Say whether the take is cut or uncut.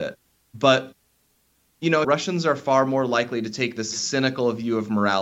cut